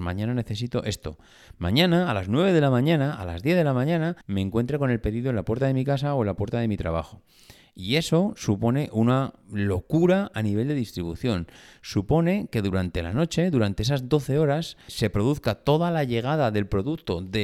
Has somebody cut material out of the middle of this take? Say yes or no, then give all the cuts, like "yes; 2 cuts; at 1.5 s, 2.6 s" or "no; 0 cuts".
yes; 2 cuts; at 4.2 s, 14.9 s